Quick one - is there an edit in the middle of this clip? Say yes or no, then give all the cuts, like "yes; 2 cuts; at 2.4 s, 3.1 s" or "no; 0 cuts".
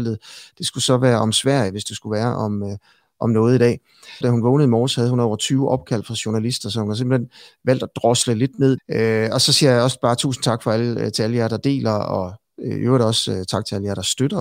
yes; 2 cuts; at 4.2 s, 8.8 s